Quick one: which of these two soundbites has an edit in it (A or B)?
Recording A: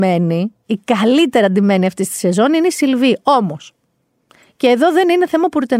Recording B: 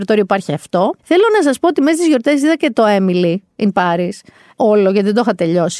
B